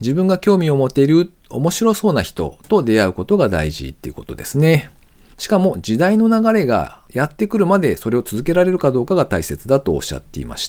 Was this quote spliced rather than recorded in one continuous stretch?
yes; 1 cut; at 5.3 s

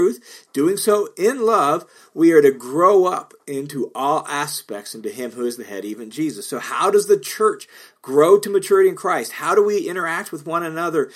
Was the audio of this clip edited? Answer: no; 0 cuts

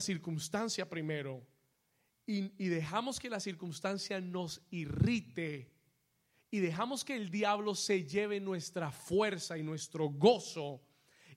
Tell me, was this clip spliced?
no; 0 cuts

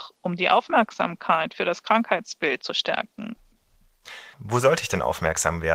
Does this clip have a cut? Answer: yes; 1 cut; at 4.3 s

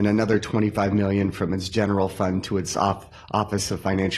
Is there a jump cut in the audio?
no; 0 cuts

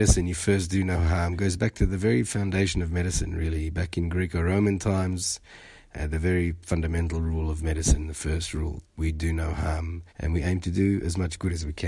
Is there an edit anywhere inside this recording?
yes; 3 cuts; at 5.9 s, 8.8 s, 10.1 s

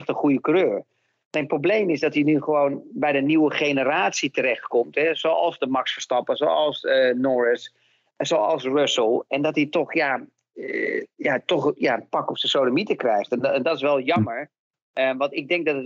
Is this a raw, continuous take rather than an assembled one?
yes; 0 cuts

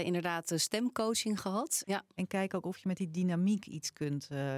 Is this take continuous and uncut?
no; 1 cut; at 1.8 s

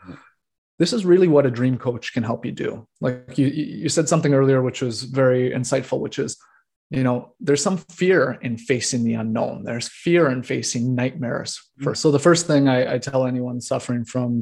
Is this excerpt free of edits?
no; 1 cut; at 11.9 s

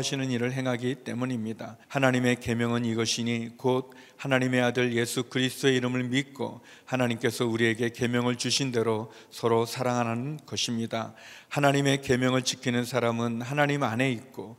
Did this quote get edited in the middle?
yes; 1 cut; at 1.8 s

